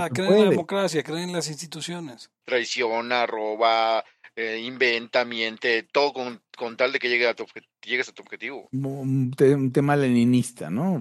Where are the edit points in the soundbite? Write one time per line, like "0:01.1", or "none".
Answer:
0:02.4